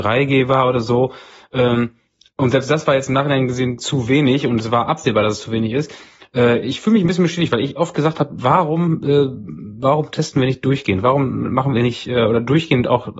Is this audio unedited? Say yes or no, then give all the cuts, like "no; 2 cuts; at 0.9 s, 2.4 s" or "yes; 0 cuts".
yes; 0 cuts